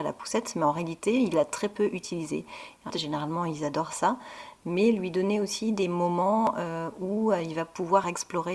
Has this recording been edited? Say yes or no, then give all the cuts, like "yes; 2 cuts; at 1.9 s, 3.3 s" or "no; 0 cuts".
yes; 1 cut; at 2.9 s